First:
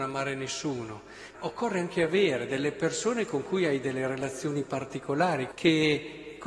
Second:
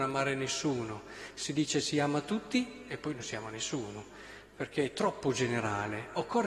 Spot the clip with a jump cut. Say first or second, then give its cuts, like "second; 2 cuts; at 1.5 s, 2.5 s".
first; 2 cuts; at 1.3 s, 5.5 s